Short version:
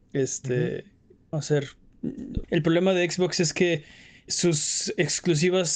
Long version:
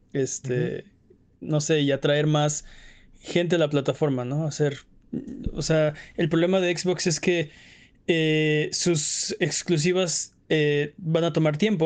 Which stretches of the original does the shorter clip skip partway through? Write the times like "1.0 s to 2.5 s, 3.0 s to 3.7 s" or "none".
1.3 s to 4.4 s, 5.5 s to 6.1 s, 7.9 s to 8.7 s